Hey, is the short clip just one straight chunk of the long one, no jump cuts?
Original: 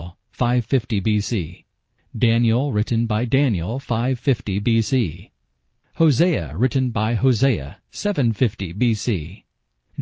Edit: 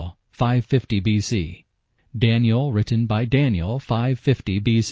yes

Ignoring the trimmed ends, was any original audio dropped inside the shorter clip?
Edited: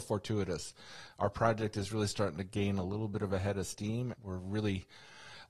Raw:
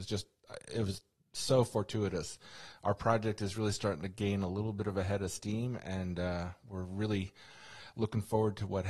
yes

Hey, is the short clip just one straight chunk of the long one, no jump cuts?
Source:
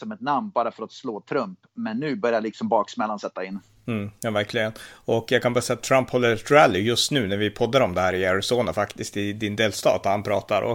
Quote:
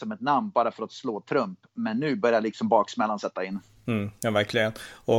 yes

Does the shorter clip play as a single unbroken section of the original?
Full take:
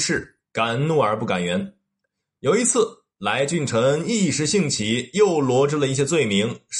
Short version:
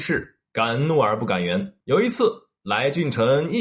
no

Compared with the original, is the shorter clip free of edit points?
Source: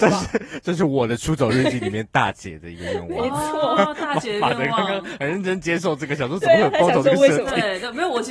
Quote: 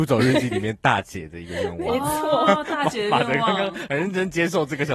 yes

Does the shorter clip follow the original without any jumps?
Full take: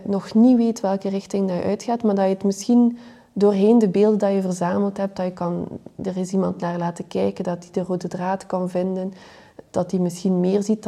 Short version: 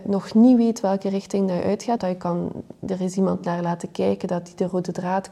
no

